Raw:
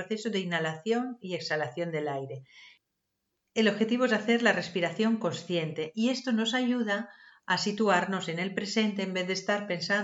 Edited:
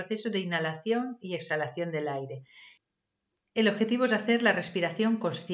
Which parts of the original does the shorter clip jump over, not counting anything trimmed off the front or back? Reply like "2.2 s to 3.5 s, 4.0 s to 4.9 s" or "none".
none